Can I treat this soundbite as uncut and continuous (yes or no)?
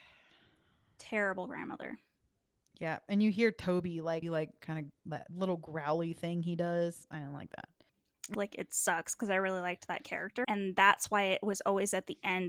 no